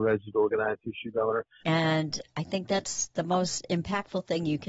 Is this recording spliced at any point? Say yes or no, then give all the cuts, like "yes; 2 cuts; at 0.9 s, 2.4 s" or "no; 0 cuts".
yes; 1 cut; at 1.6 s